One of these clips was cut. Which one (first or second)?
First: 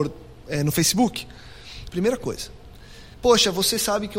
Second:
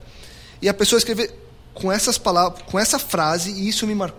first